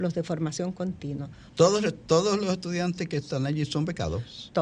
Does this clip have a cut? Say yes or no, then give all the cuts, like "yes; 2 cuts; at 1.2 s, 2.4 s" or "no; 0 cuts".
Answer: yes; 1 cut; at 1.5 s